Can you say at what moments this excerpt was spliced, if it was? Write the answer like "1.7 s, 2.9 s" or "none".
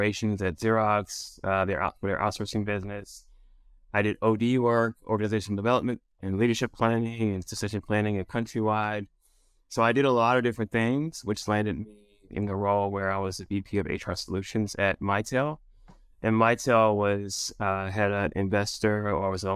12.3 s